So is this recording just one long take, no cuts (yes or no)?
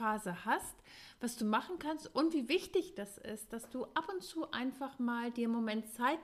yes